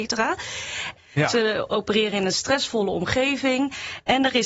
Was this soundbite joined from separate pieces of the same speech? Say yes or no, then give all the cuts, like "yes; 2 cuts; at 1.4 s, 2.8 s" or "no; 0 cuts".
yes; 1 cut; at 1.0 s